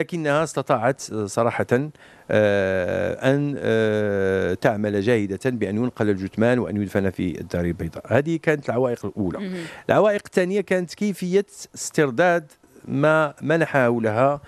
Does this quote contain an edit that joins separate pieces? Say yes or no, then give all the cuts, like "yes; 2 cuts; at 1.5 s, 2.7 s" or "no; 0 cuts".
no; 0 cuts